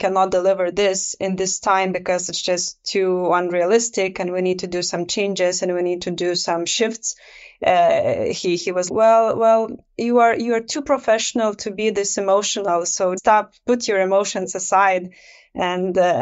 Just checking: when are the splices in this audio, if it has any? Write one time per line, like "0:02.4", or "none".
0:08.9
0:13.2